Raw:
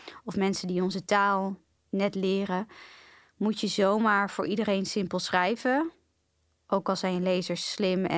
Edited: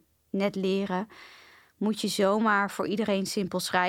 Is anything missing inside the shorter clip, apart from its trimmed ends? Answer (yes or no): no